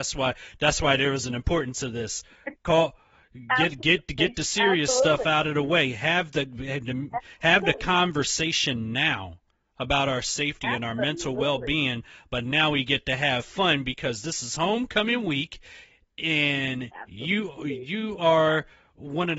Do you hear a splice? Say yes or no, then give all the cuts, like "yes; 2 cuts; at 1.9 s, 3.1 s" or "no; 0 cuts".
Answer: no; 0 cuts